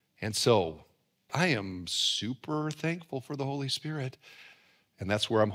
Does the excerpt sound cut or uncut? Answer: cut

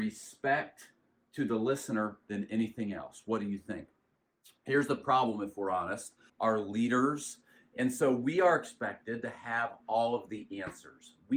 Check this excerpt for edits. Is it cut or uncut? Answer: cut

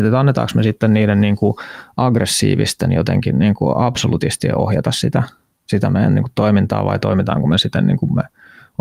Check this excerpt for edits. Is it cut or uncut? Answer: uncut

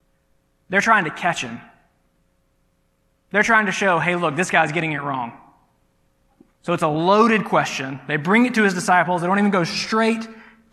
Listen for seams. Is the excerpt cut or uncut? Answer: uncut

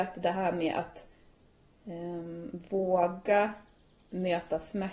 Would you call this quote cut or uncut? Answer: uncut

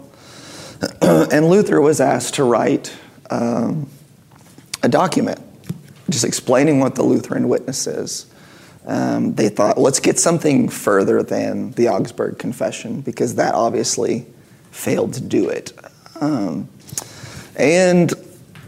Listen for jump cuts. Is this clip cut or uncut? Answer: uncut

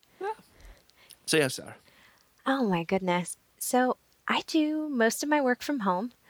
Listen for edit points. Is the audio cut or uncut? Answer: cut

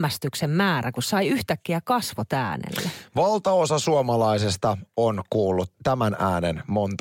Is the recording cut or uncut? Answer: cut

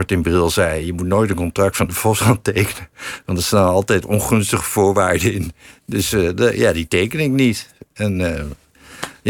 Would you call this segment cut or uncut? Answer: uncut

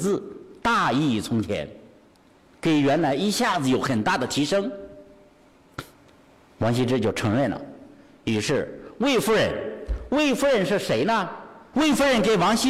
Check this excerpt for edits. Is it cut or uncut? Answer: cut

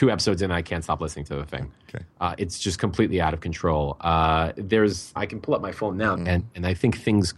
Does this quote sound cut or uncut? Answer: cut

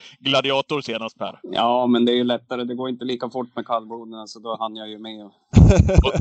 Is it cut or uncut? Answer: cut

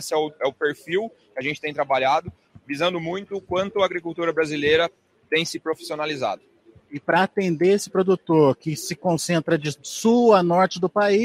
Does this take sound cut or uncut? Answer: uncut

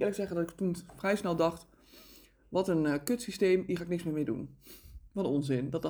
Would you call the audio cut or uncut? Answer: uncut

